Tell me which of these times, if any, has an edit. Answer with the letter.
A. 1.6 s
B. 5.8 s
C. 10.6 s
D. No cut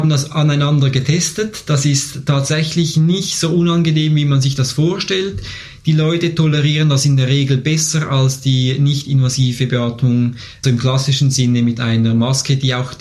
C